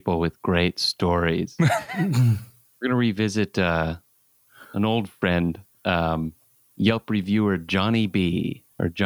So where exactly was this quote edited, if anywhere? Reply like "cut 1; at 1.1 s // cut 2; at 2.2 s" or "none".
none